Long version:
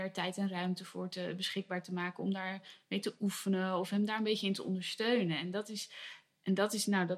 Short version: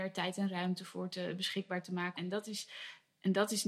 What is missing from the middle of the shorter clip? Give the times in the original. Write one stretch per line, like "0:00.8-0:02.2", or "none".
0:02.2-0:05.4